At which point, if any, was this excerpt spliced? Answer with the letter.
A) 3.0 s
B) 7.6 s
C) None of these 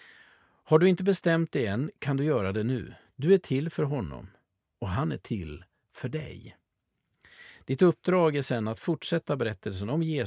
A